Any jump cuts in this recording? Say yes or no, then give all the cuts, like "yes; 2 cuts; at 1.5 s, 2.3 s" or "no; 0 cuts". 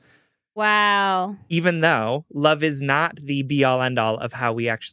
no; 0 cuts